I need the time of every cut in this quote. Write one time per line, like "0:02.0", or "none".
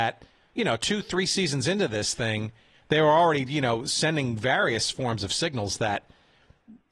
none